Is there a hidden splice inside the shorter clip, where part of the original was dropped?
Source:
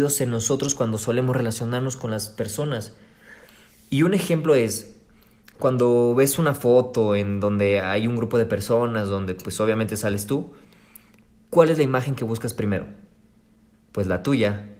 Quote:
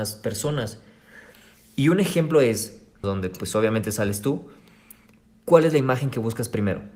yes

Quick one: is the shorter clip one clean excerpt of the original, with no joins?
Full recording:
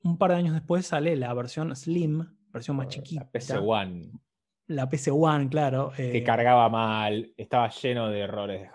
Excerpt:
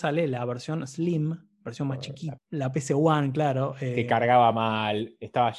no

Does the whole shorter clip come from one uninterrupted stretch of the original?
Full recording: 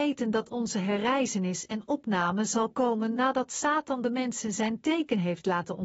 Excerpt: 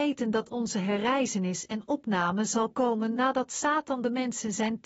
yes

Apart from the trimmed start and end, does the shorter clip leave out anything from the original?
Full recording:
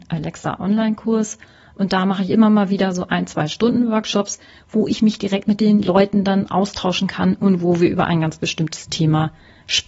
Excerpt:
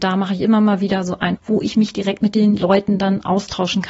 yes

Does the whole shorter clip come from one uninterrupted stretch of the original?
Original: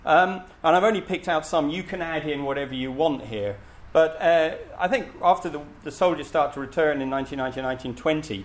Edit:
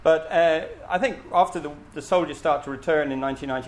yes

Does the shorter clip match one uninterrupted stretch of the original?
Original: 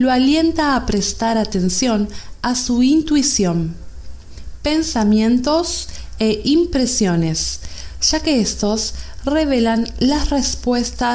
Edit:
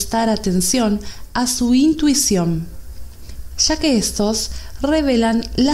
no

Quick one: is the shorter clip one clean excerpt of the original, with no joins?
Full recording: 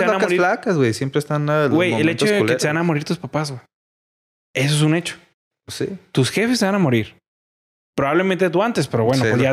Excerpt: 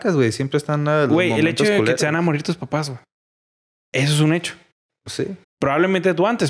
no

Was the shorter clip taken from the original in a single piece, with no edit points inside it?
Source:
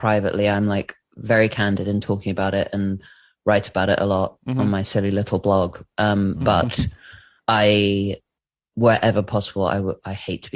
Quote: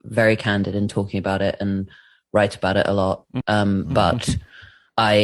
no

